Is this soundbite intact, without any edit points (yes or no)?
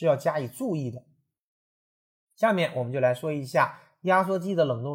yes